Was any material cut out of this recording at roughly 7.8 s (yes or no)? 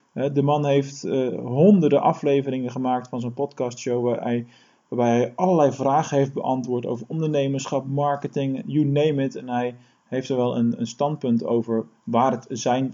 no